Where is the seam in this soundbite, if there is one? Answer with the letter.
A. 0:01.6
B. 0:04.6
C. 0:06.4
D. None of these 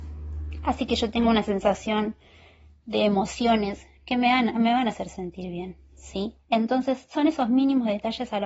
C